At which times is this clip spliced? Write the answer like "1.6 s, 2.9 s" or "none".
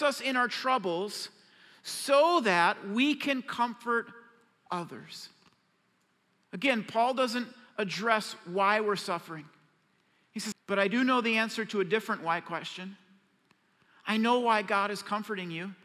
10.5 s